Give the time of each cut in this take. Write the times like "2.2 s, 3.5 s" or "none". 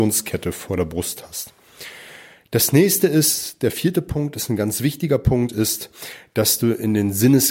none